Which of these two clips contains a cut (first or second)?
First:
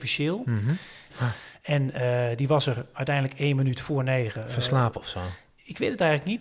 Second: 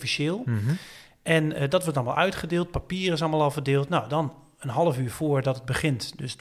first